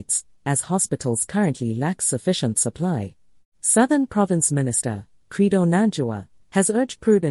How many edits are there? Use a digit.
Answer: 1